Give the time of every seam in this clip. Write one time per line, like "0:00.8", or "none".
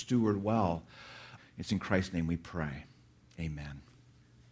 0:01.4